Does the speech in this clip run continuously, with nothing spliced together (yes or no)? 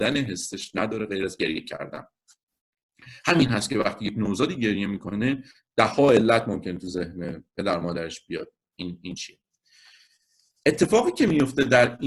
yes